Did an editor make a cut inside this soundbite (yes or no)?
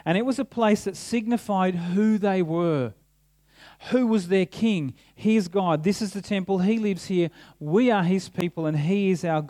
no